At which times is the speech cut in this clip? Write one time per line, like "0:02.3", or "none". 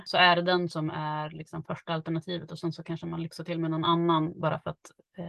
none

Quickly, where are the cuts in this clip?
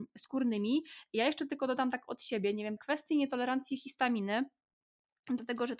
0:02.8

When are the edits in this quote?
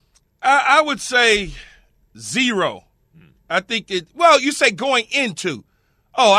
none

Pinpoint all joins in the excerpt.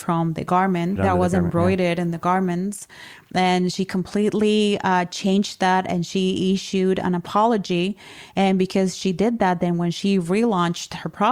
0:01.0

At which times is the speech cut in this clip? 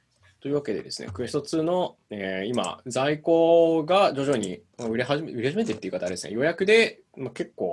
none

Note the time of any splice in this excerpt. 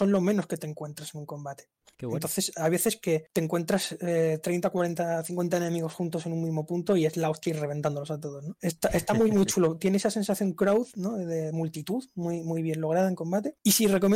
none

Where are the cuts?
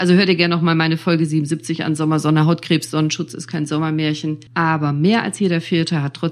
0:04.5

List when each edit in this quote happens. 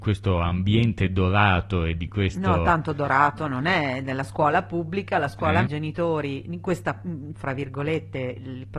0:05.7
0:07.3

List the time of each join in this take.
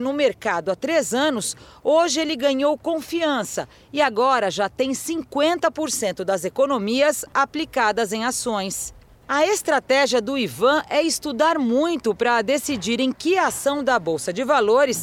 0:09.2

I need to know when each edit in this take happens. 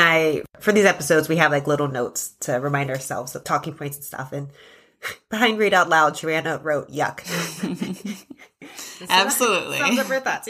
0:03.4

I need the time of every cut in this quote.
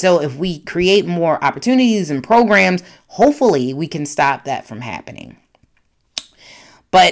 none

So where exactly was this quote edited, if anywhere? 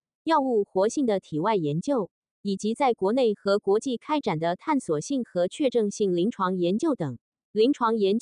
none

